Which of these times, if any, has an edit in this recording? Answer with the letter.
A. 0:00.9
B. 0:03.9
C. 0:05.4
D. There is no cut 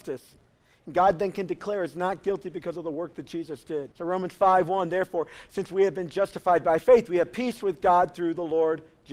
B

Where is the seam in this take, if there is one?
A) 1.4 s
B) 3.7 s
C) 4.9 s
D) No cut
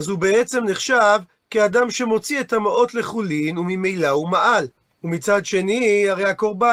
C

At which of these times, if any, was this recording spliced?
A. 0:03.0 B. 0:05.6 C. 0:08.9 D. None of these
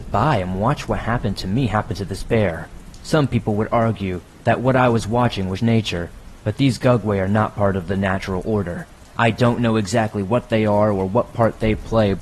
B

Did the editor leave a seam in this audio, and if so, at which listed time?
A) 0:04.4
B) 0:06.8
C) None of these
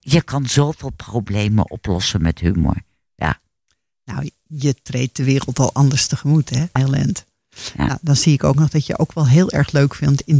B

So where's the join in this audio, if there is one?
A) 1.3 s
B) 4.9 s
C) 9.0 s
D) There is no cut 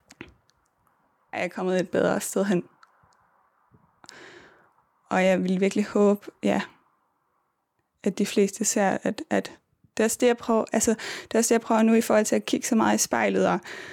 A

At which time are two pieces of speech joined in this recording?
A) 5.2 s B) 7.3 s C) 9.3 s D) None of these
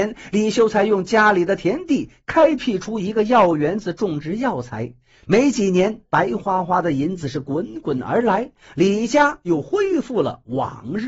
D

